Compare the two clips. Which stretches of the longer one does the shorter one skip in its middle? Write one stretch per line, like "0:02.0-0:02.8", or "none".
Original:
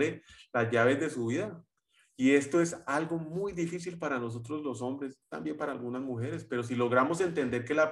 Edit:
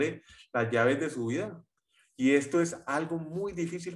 none